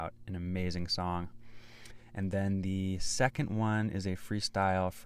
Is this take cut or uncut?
uncut